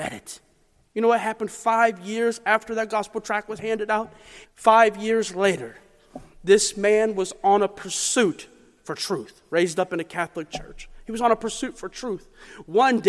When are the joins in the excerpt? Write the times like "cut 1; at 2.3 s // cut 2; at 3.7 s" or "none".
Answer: cut 1; at 4.4 s